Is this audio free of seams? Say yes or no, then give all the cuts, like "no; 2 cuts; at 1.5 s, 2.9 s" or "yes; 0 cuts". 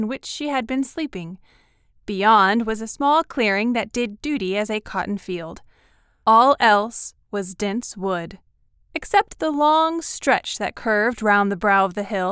yes; 0 cuts